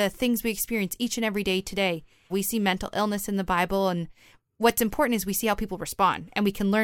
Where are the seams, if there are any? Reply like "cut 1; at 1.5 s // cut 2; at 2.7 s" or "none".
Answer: cut 1; at 2.3 s